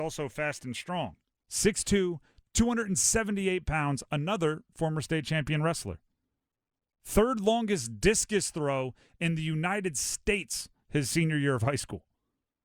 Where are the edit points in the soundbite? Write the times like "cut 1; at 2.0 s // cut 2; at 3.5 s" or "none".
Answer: cut 1; at 1.4 s